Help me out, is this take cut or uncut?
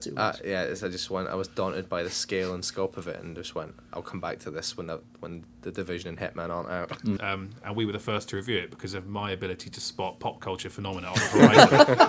cut